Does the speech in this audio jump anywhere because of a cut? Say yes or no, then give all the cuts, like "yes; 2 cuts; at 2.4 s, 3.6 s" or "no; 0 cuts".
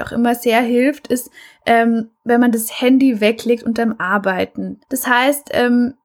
yes; 1 cut; at 4.8 s